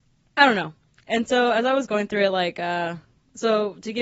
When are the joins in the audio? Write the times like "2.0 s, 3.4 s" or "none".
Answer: none